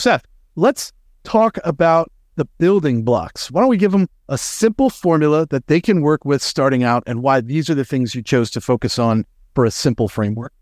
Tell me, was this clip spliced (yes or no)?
no